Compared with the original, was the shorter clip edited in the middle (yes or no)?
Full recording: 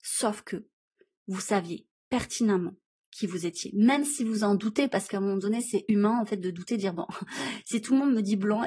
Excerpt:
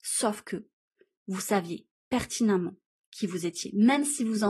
no